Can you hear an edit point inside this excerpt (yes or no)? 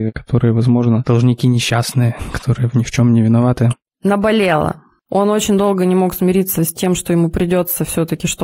yes